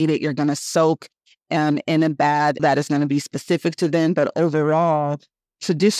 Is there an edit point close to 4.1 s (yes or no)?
no